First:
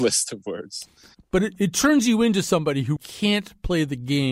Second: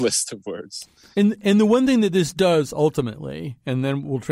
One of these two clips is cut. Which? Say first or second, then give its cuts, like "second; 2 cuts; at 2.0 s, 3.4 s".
first; 2 cuts; at 1.1 s, 3.0 s